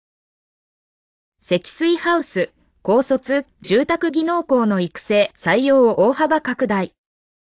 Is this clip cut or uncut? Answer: cut